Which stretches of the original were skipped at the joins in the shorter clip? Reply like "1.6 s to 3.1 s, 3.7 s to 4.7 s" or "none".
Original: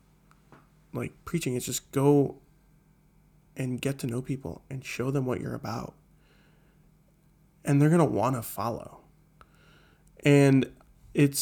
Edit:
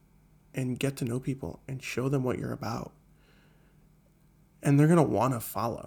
none